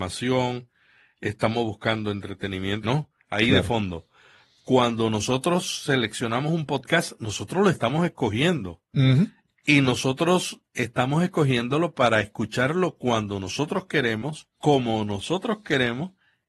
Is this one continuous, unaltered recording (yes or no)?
no